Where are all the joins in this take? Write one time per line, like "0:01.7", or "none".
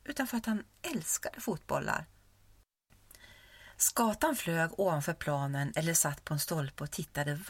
none